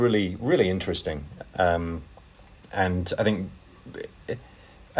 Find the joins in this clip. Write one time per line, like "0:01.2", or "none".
none